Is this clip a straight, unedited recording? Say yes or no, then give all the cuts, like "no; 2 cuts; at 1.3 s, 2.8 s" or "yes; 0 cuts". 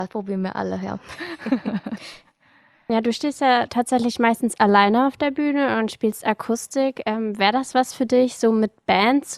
no; 1 cut; at 2.9 s